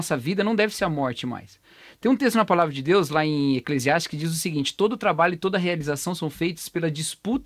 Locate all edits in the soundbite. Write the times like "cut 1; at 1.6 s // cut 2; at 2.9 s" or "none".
none